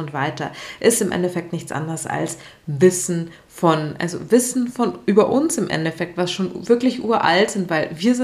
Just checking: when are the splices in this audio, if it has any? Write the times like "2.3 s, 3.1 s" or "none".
none